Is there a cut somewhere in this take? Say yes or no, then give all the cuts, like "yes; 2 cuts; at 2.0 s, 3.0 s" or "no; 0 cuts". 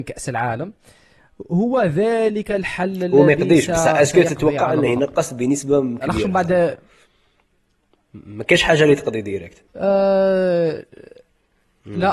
yes; 1 cut; at 9.7 s